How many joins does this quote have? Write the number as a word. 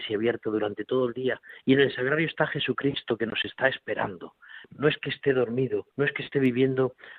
three